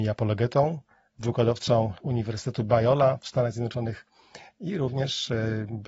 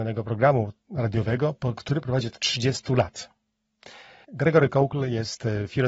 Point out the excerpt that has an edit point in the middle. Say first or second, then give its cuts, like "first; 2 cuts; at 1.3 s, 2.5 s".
second; 1 cut; at 4.2 s